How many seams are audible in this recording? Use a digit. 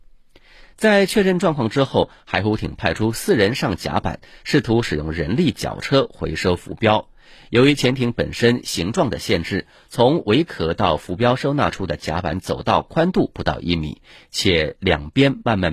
0